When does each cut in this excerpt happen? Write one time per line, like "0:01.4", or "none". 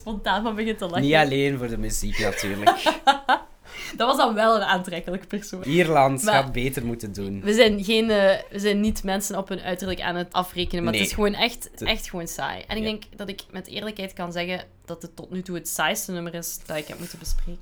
0:05.6
0:10.3
0:11.8